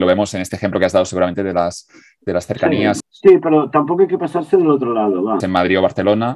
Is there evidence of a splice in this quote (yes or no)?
yes